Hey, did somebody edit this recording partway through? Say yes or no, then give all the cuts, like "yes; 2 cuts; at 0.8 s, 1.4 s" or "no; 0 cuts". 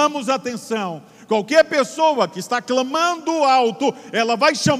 no; 0 cuts